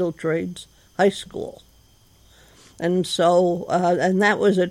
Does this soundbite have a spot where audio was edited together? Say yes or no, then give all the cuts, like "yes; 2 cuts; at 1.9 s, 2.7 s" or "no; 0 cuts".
no; 0 cuts